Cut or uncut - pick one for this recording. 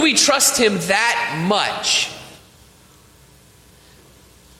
uncut